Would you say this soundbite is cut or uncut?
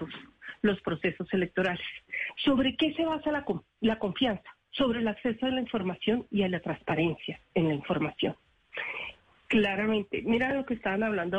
cut